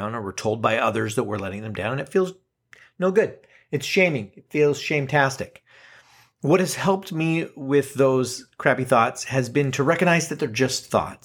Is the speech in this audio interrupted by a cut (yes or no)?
no